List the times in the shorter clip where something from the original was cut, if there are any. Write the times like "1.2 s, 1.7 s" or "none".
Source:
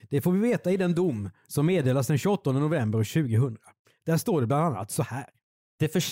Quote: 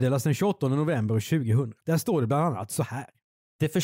1.8 s